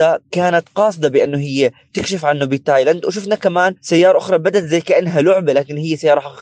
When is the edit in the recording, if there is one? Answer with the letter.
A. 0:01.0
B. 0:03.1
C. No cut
C